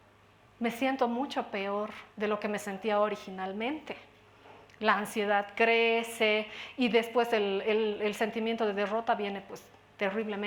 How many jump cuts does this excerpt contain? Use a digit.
1